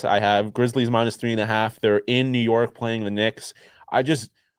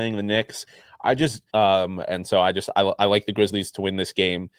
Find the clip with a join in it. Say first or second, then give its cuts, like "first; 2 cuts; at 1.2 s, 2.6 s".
second; 1 cut; at 1.5 s